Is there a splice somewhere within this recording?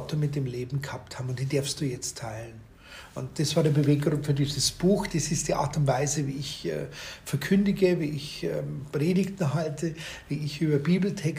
no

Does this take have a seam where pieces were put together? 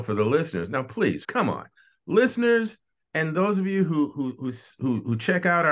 yes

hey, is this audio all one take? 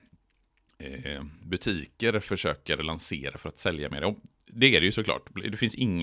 yes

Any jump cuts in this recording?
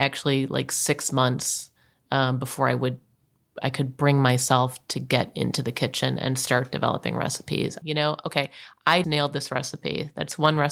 yes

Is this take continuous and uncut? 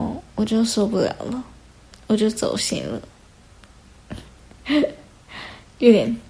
yes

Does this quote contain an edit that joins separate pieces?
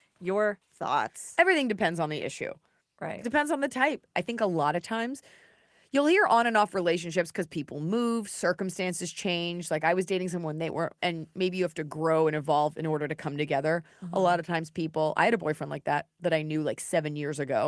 yes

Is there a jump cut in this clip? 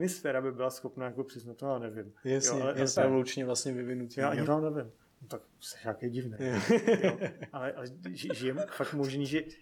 yes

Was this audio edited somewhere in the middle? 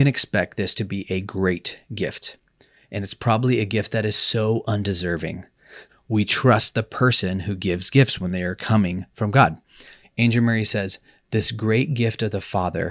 yes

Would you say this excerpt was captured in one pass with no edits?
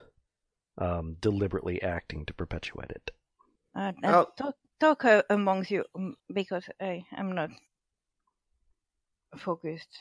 no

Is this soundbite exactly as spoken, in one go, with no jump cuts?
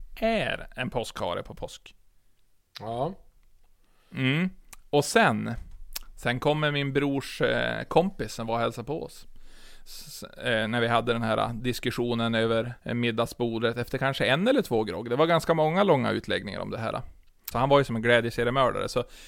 no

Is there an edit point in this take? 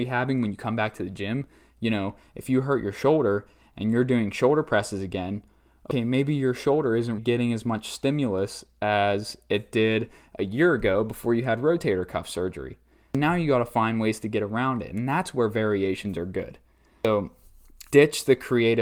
yes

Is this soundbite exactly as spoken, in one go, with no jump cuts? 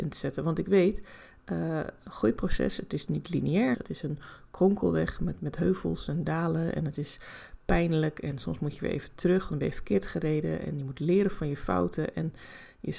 no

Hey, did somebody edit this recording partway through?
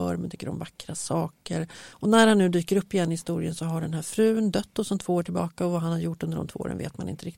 yes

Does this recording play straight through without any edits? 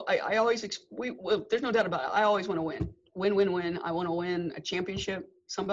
yes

